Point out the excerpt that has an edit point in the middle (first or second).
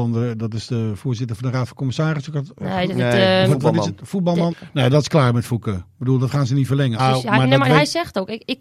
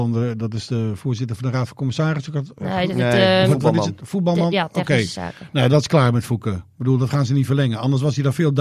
first